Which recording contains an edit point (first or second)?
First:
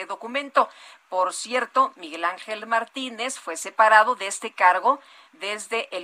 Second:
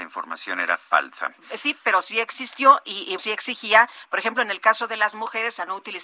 second